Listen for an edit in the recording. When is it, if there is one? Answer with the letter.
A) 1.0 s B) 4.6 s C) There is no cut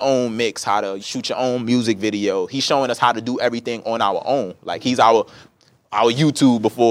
A